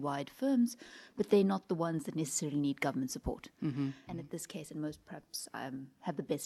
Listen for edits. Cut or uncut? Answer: cut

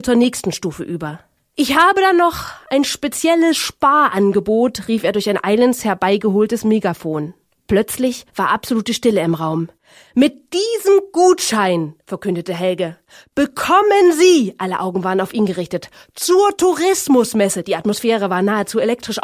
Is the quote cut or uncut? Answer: uncut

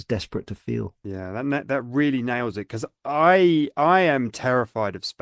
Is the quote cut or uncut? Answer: uncut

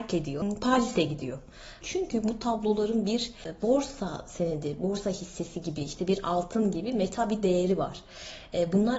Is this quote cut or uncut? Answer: cut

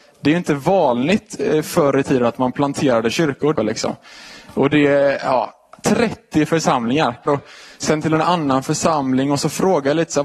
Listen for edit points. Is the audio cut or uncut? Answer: cut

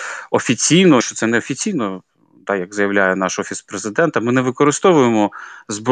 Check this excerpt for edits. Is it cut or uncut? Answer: cut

